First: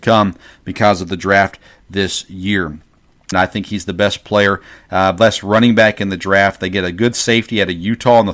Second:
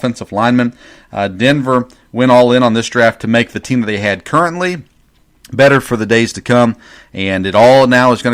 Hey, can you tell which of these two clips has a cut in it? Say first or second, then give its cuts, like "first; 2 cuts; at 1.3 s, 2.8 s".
first; 1 cut; at 3.3 s